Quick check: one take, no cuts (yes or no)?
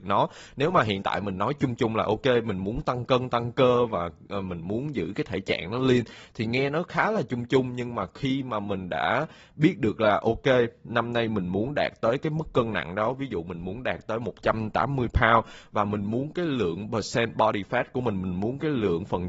yes